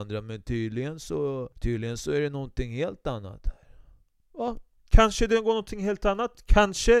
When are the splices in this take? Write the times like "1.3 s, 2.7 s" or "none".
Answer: 1.5 s